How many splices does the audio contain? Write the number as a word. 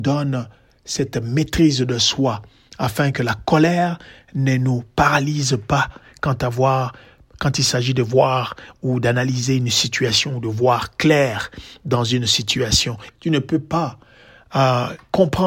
one